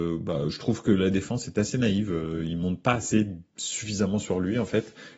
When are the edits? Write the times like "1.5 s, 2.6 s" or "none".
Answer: none